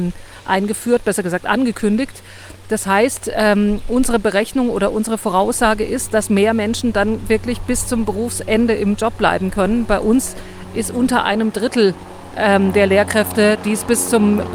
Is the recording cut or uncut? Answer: uncut